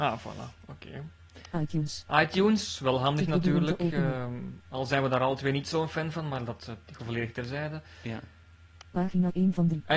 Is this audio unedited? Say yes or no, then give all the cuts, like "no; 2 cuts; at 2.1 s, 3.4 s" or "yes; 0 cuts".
yes; 0 cuts